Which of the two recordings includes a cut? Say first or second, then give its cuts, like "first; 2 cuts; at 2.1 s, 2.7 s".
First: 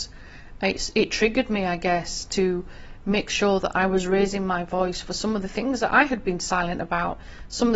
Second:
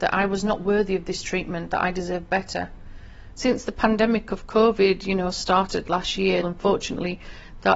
second; 2 cuts; at 3.4 s, 6.4 s